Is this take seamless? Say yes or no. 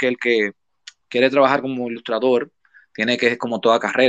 yes